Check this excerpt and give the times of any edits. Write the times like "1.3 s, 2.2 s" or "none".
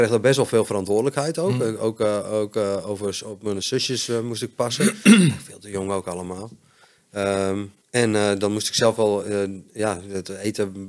7.8 s

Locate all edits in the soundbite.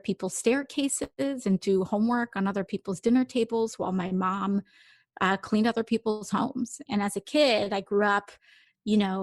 6.9 s

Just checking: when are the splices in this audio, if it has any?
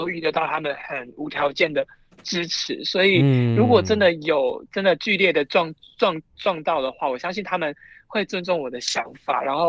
none

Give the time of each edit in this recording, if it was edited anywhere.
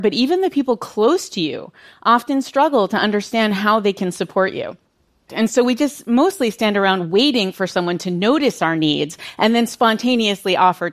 5.3 s

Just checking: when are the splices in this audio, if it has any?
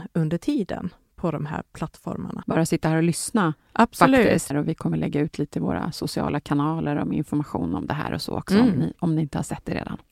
2.4 s, 4.5 s

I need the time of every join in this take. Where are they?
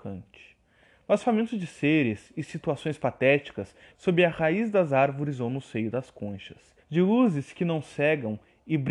3.9 s, 6.8 s

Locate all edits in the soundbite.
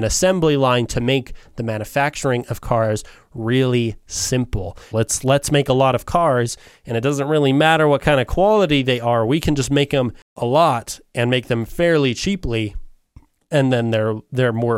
4.9 s

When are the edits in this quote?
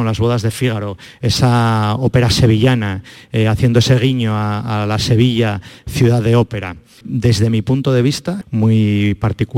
7.0 s, 8.4 s

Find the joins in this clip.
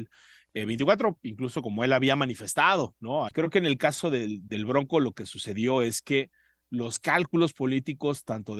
3.3 s

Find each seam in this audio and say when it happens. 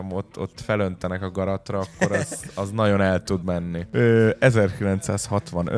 none

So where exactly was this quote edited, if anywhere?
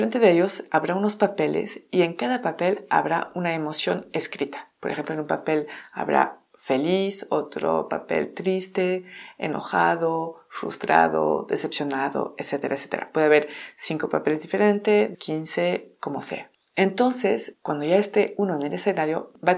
15.1 s

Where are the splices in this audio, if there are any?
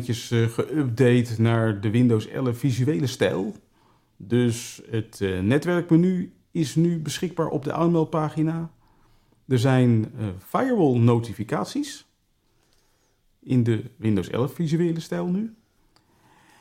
none

